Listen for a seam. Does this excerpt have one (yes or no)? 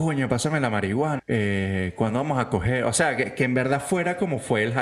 yes